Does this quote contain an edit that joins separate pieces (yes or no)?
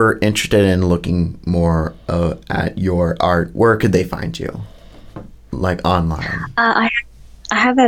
no